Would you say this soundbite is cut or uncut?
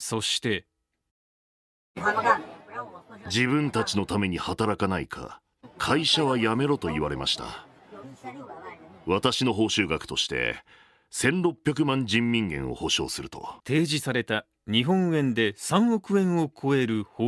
cut